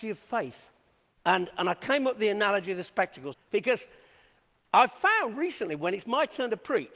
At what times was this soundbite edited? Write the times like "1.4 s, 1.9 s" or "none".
1.2 s, 3.3 s